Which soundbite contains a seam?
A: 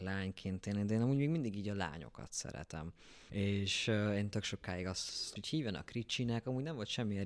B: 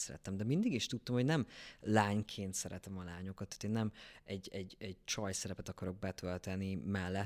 A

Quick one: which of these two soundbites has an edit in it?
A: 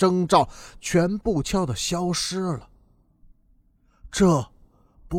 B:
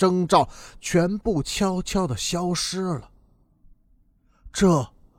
A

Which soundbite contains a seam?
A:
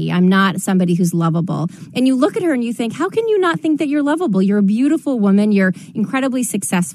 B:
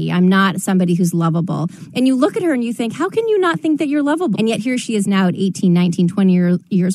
B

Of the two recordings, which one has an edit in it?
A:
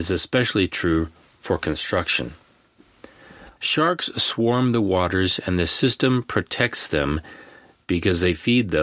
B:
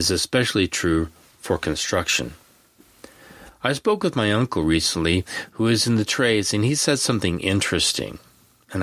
A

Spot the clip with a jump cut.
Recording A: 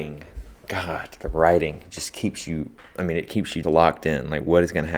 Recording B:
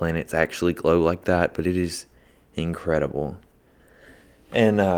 A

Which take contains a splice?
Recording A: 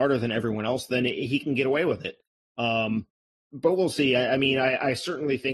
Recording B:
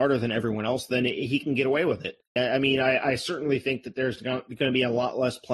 B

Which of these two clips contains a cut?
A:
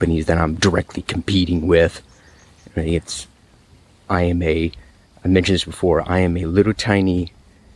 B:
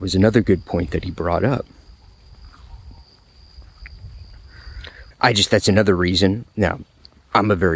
B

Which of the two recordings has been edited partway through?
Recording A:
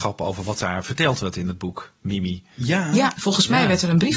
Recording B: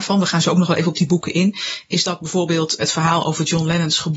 B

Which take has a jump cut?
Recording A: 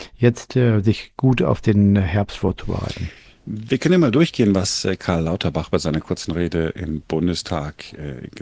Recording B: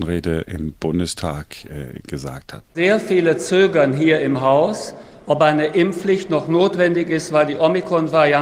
B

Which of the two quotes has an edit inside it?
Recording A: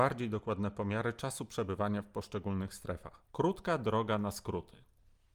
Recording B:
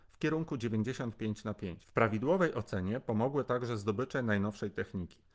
A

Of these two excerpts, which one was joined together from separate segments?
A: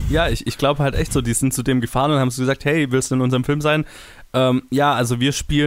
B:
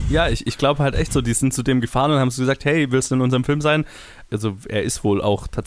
B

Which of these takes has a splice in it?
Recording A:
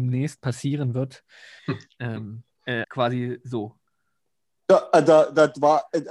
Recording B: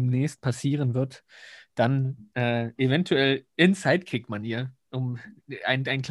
A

